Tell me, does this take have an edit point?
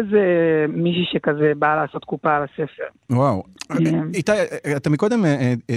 no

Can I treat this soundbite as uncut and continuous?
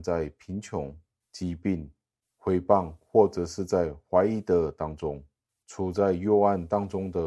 yes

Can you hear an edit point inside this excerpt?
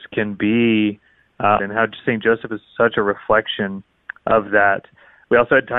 yes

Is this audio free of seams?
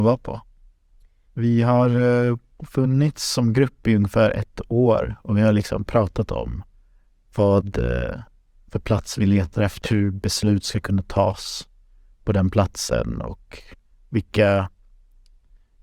no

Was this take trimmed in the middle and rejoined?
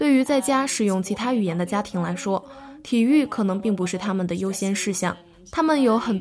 no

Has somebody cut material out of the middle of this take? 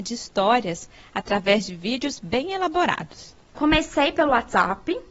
no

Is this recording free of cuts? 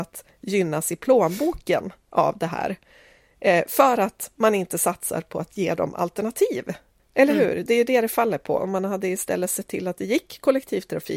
yes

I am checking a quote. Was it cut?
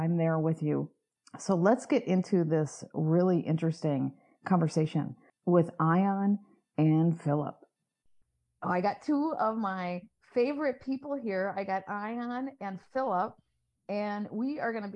no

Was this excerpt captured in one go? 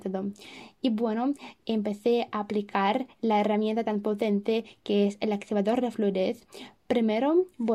yes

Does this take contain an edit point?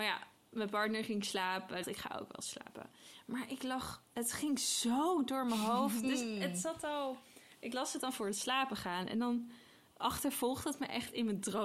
yes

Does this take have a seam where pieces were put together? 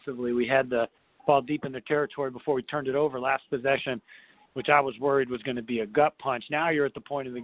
no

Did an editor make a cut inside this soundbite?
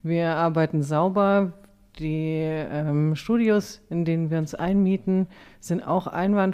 no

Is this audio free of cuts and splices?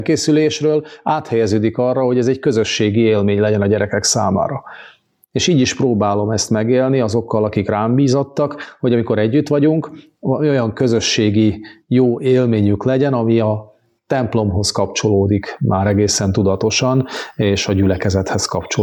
yes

